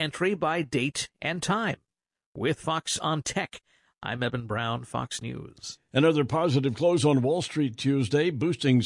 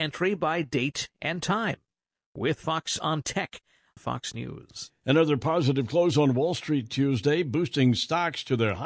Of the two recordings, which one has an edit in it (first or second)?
second